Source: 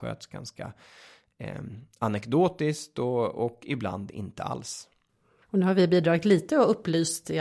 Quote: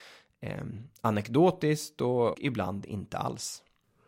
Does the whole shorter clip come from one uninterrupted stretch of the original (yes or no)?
no